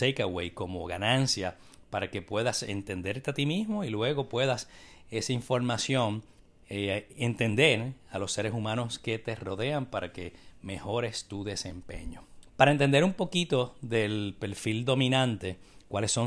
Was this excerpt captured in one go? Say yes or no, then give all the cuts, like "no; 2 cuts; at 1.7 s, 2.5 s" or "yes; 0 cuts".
no; 1 cut; at 12.5 s